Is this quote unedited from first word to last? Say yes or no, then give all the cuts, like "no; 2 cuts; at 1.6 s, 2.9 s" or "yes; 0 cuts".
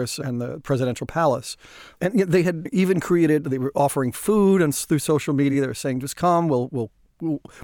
yes; 0 cuts